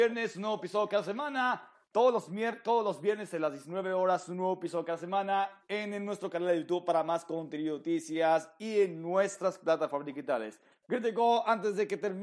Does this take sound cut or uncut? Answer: uncut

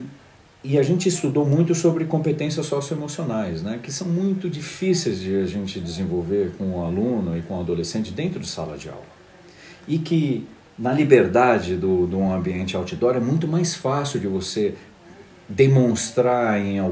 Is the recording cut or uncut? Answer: uncut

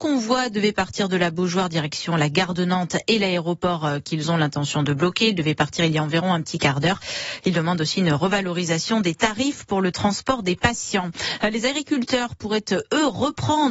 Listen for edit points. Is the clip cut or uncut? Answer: uncut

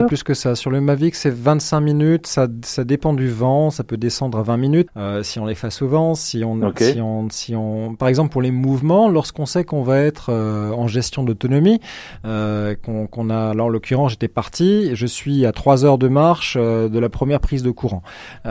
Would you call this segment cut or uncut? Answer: cut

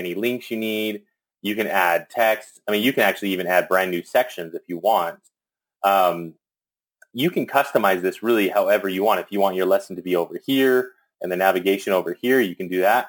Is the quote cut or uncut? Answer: uncut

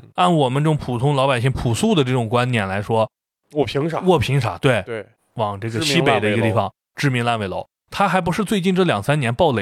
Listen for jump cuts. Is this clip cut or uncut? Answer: cut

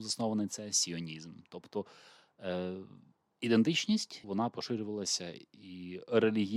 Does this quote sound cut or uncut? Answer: cut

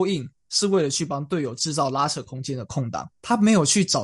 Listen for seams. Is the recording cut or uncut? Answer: uncut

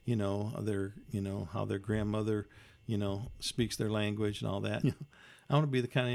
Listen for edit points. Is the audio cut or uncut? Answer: cut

